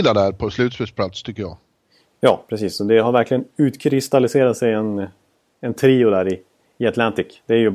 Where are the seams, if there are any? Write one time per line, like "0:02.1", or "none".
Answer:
none